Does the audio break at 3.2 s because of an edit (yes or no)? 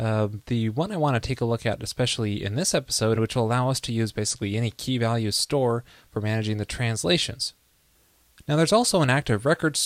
yes